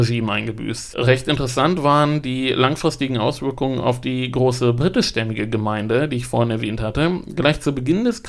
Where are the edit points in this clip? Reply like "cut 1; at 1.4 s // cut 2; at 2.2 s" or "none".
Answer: cut 1; at 0.9 s

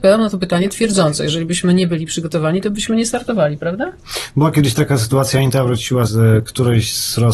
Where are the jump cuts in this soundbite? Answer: cut 1; at 6.1 s

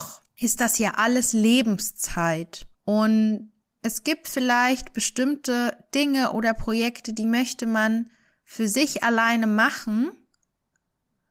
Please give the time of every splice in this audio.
none

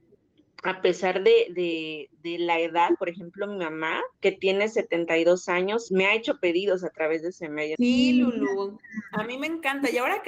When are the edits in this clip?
cut 1; at 4.1 s // cut 2; at 5.9 s // cut 3; at 7.8 s

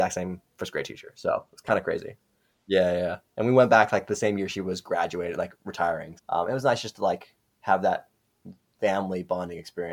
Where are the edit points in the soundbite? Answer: cut 1; at 2.5 s // cut 2; at 6.2 s

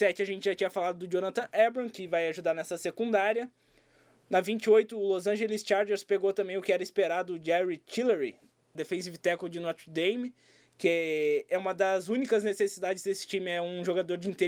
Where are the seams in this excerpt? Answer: cut 1; at 8.8 s

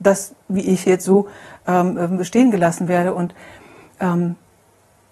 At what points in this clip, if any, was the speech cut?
none

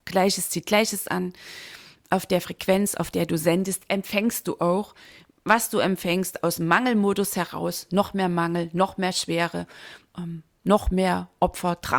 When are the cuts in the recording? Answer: none

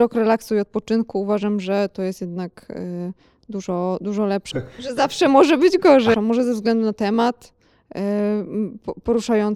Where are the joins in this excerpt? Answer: cut 1; at 4.5 s // cut 2; at 6.1 s

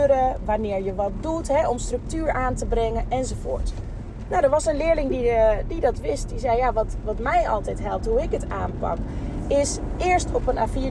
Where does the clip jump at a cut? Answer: none

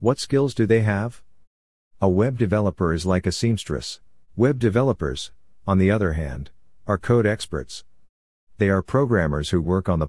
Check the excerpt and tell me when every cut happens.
cut 1; at 1.9 s // cut 2; at 4.3 s

